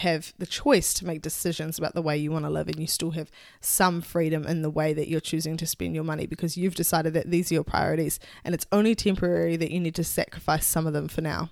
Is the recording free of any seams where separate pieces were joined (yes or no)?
yes